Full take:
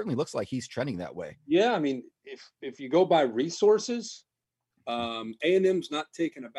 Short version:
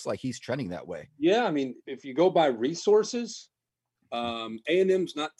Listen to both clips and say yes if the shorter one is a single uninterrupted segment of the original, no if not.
no